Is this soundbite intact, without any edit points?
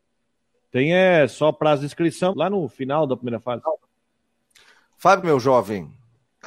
no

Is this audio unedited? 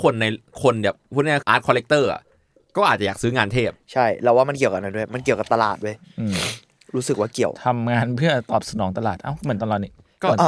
no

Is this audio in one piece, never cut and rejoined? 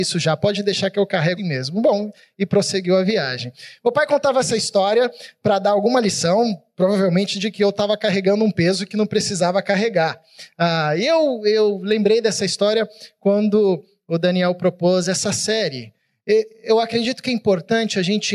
no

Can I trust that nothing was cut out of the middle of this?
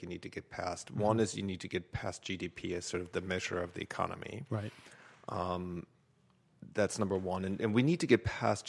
yes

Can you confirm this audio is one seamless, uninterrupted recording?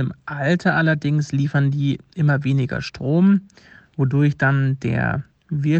yes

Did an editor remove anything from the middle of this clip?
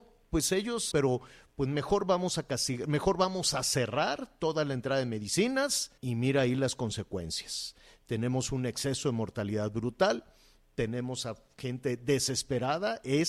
yes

